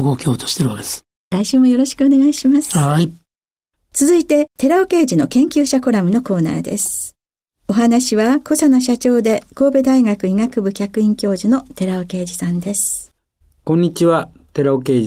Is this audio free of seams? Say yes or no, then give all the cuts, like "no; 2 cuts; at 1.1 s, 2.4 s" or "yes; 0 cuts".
no; 1 cut; at 1.2 s